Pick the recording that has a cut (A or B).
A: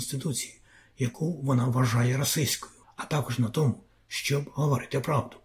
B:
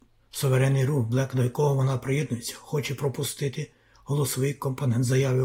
A